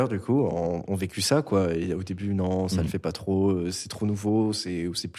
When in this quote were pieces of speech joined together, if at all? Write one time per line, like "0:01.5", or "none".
none